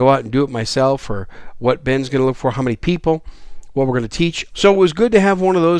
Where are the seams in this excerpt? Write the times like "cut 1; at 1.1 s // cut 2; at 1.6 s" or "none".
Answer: cut 1; at 4.5 s